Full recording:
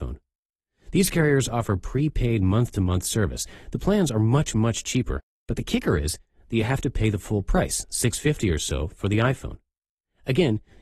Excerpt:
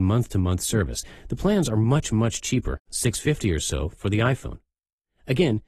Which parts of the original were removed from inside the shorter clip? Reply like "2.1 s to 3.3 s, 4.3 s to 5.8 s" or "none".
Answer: 5.3 s to 7.9 s